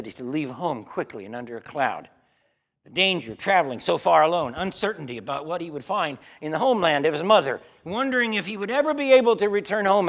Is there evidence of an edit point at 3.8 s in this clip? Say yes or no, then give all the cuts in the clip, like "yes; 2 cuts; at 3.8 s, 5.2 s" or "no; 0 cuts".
no; 0 cuts